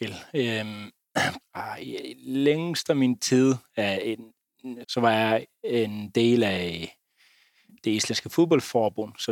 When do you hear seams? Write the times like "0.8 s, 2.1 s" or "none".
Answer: 1.4 s, 4.8 s